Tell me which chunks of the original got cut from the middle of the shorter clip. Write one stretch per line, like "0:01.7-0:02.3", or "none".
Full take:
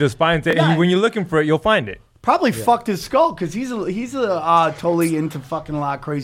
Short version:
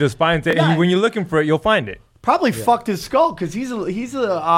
none